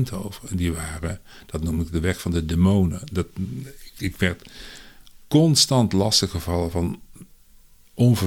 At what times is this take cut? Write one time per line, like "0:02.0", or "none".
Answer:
none